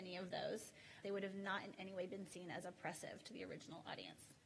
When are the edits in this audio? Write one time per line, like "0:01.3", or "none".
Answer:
0:01.0